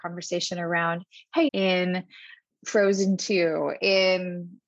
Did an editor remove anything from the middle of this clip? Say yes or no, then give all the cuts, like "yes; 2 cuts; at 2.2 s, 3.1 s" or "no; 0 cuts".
yes; 1 cut; at 1.5 s